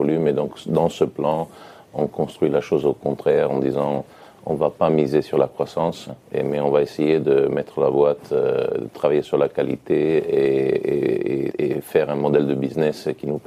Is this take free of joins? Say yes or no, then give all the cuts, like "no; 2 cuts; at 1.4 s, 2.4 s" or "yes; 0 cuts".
no; 2 cuts; at 6.2 s, 11.5 s